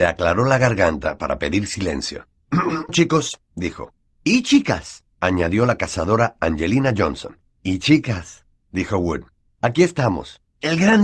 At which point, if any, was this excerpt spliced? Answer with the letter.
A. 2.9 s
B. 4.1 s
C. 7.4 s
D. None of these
A